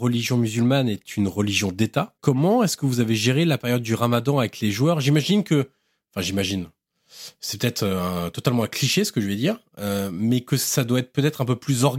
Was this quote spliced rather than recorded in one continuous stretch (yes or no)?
no